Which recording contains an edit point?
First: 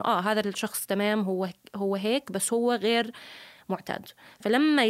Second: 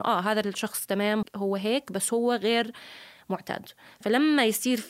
second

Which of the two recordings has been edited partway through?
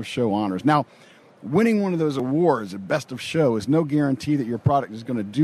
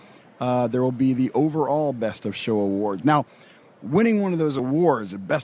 second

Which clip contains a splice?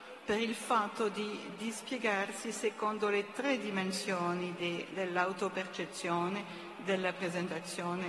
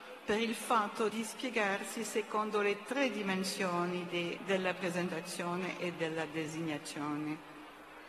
second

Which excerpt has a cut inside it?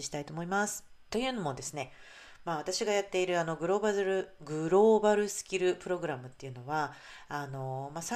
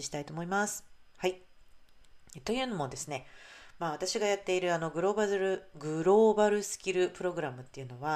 first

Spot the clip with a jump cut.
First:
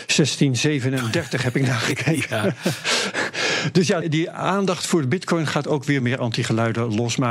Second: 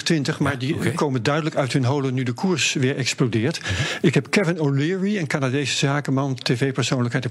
first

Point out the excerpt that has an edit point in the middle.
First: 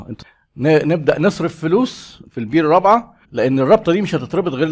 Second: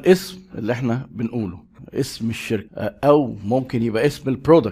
first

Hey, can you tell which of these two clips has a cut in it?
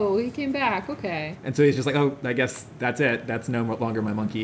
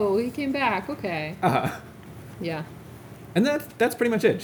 first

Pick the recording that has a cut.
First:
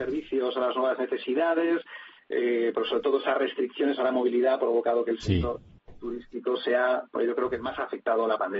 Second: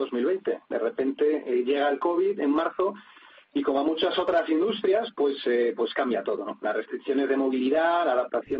first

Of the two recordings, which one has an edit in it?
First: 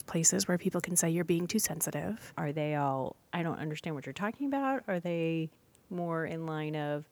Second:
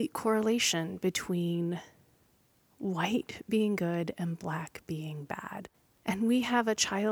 first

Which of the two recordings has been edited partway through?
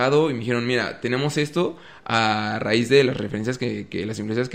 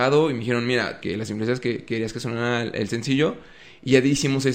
second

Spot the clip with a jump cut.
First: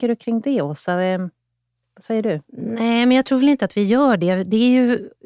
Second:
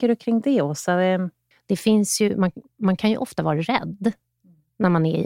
second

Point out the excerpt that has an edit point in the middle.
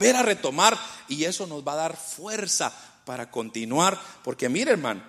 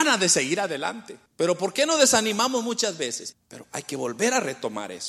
second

